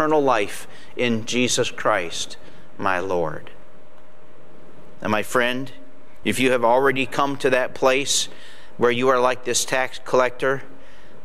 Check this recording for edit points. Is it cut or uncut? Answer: cut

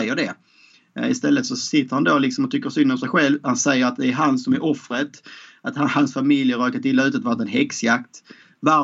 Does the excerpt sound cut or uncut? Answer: uncut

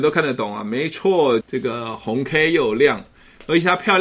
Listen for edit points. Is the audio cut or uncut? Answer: cut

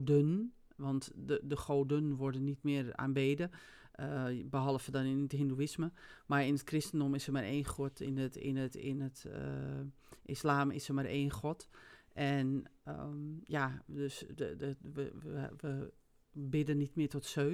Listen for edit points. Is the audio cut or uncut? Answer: uncut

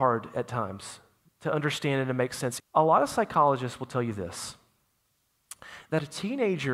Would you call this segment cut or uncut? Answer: cut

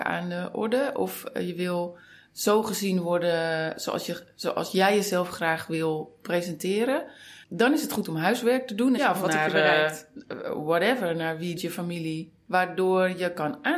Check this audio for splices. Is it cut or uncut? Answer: cut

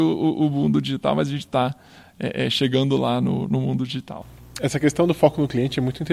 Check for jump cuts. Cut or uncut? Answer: uncut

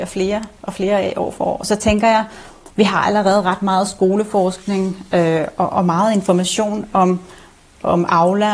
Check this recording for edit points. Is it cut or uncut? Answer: uncut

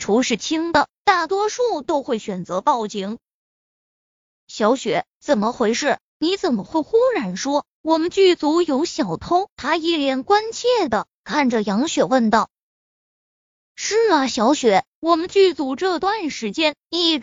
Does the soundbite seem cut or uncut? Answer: cut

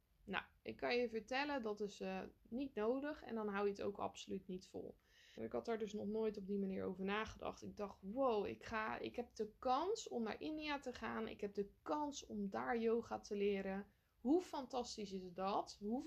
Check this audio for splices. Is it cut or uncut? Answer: cut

